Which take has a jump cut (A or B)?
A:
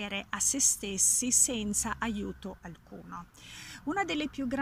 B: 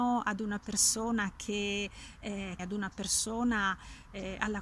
B